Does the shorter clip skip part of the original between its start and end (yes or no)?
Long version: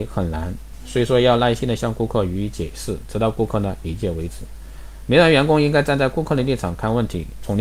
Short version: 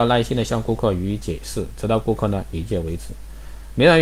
no